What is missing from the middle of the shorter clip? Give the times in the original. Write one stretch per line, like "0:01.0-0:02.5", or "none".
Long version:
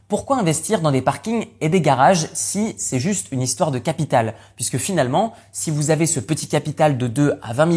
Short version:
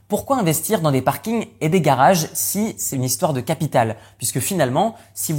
0:02.9-0:03.3